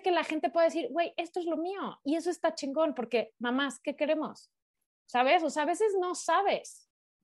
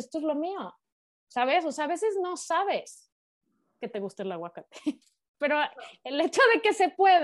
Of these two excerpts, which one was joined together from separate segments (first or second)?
first